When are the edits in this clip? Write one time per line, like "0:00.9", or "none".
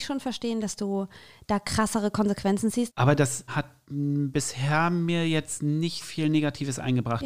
0:02.9
0:06.0